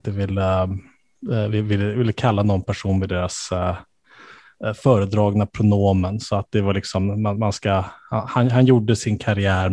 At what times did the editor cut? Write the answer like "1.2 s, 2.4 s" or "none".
none